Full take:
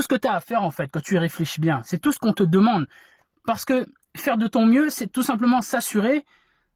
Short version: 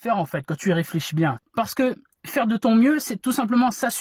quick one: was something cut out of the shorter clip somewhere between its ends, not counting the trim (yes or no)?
yes